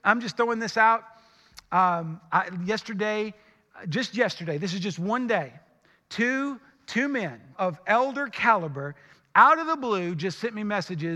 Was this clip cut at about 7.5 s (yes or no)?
yes